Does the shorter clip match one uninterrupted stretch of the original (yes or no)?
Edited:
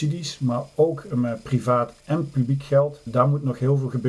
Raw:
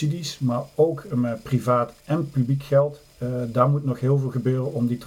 no